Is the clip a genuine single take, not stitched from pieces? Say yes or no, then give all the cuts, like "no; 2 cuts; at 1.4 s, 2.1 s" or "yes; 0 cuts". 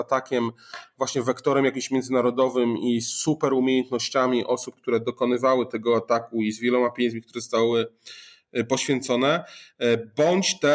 yes; 0 cuts